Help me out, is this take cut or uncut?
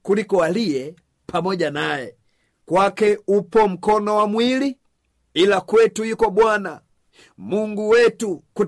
cut